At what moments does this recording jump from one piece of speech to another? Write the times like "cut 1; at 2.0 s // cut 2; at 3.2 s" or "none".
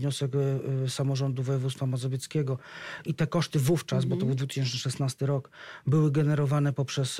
cut 1; at 3.1 s